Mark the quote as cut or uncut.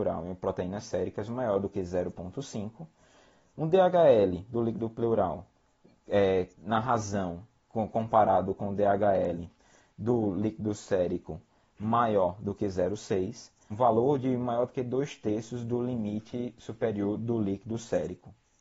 cut